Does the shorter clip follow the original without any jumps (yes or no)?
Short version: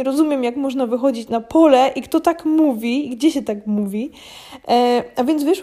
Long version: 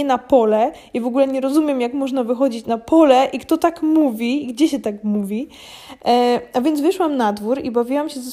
yes